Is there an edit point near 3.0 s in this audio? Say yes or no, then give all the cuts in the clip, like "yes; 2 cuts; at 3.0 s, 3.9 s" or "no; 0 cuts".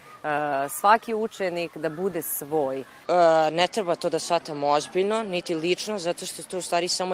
yes; 1 cut; at 3.0 s